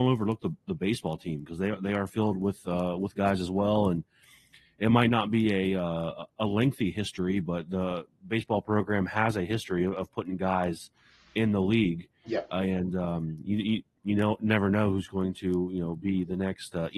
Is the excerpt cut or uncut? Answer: uncut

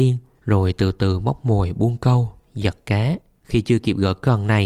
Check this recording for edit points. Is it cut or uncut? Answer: cut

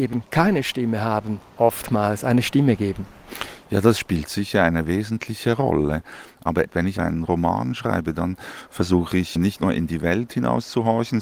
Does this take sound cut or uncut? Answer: uncut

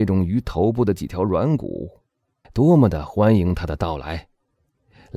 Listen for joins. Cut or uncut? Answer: cut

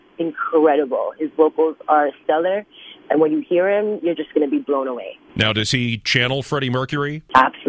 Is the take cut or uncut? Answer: uncut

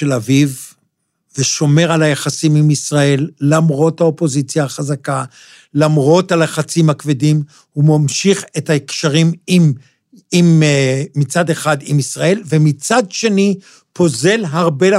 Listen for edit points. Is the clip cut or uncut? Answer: uncut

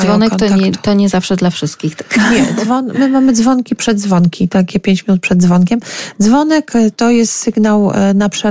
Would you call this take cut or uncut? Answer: uncut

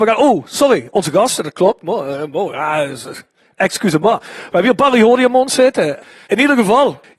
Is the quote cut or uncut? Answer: cut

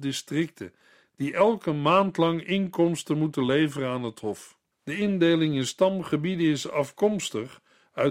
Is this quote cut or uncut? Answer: cut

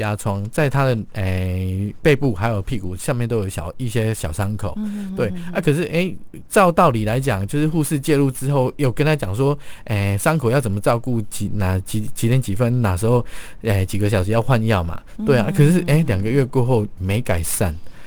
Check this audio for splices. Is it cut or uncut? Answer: cut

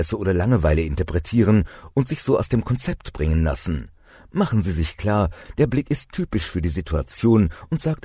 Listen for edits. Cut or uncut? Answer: uncut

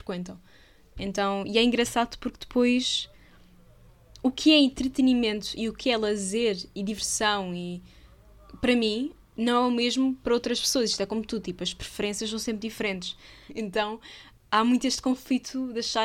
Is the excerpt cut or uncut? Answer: cut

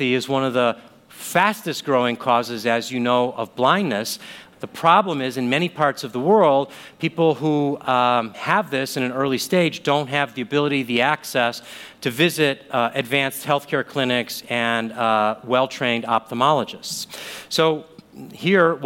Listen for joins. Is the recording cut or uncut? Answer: cut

